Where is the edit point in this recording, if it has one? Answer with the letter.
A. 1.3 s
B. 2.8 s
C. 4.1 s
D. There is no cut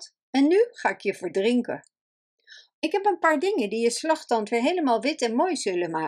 B